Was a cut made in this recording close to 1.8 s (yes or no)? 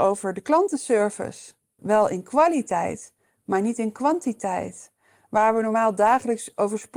yes